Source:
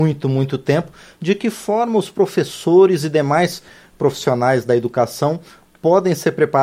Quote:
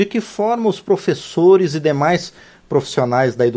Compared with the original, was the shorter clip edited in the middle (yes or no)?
no